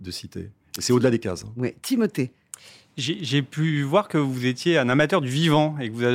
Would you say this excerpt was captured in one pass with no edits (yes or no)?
yes